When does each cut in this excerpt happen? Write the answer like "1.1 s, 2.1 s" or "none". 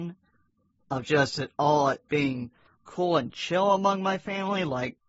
none